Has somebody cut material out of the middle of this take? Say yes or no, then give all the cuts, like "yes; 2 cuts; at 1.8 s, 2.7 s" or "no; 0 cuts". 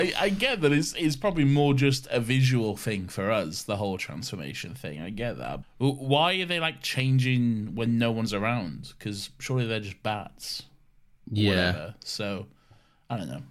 yes; 1 cut; at 5.6 s